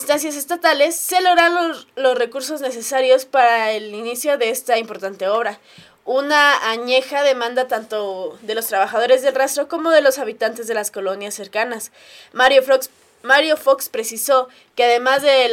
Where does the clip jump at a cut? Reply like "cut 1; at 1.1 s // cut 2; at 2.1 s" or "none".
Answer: none